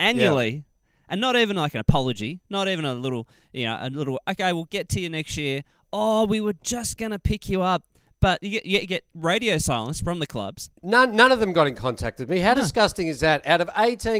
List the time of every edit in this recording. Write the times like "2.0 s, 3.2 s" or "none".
10.8 s